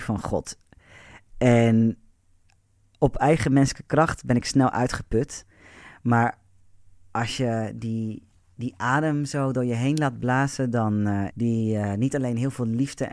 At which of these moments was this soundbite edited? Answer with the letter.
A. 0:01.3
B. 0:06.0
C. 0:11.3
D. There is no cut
C